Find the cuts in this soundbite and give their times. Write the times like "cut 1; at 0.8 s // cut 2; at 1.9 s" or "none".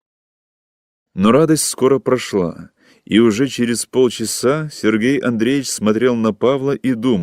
cut 1; at 1.1 s